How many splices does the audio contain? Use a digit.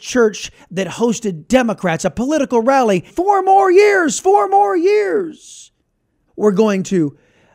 2